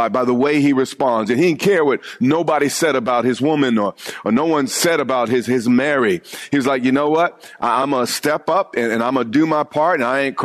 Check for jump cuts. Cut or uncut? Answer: uncut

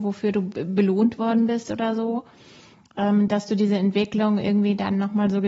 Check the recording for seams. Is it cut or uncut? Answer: uncut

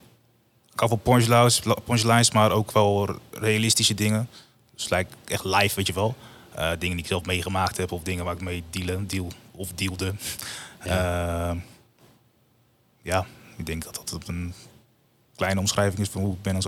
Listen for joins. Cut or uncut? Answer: uncut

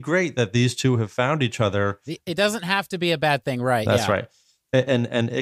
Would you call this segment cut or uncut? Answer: uncut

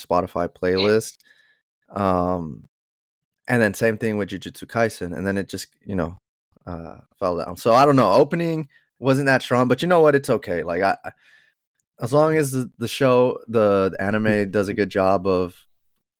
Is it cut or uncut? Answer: uncut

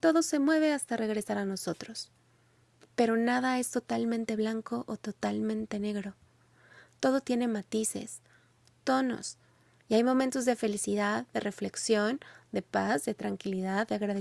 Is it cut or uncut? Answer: cut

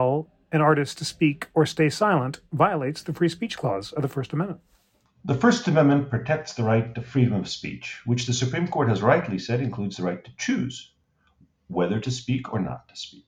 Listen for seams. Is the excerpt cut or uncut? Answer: uncut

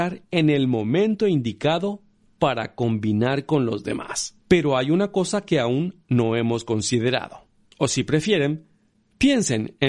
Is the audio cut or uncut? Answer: cut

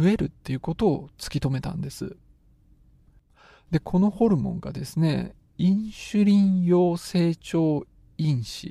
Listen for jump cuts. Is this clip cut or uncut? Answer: uncut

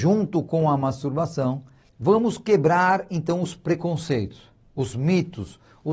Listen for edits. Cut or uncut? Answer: cut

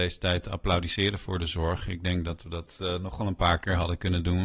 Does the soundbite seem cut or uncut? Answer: uncut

